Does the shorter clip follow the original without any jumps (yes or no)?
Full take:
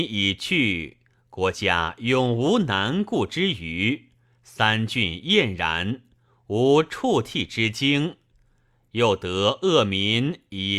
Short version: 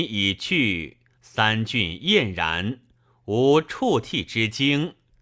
no